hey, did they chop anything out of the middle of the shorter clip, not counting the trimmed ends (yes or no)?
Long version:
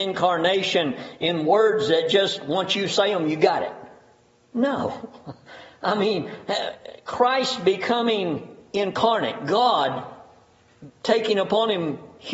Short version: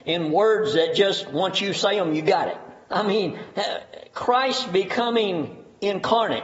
yes